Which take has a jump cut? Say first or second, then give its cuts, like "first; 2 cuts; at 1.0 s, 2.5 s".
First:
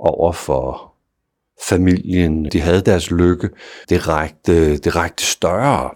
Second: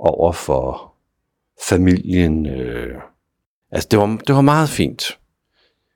first; 2 cuts; at 2.5 s, 3.8 s